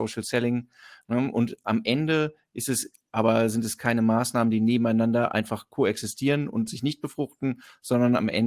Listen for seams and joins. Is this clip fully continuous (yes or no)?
yes